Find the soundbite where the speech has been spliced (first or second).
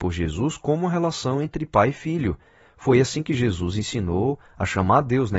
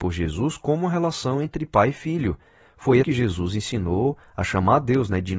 second